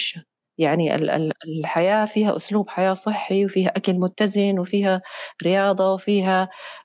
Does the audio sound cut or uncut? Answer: uncut